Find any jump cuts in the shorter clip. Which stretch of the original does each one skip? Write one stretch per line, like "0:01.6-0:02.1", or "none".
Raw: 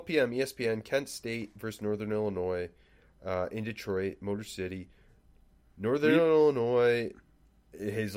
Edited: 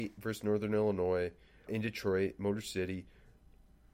0:03.0-0:03.5